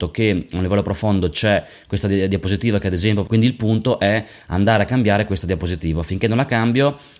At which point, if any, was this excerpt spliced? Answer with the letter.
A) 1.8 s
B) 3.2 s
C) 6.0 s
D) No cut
B